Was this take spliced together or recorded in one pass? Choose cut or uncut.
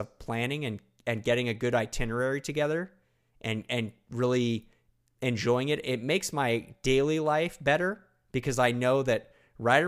uncut